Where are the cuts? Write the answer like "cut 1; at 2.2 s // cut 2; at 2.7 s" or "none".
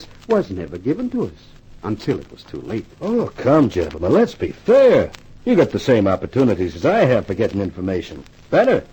none